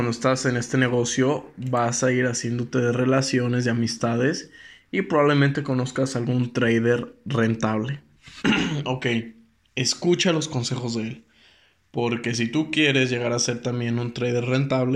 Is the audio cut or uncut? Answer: uncut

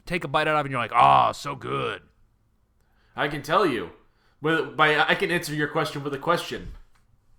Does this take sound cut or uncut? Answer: uncut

